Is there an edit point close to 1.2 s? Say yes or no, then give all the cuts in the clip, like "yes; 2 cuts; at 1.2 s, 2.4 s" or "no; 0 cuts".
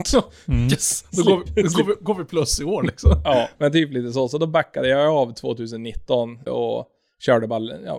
no; 2 cuts; at 3.5 s, 6.5 s